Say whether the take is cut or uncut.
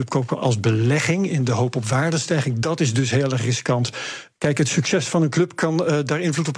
uncut